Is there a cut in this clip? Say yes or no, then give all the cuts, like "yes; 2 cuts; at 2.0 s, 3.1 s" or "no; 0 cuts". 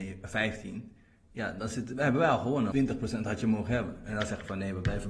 yes; 1 cut; at 2.7 s